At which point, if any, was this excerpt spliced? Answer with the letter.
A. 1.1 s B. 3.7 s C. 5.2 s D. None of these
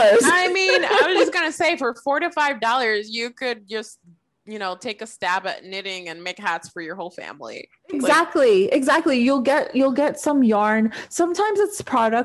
D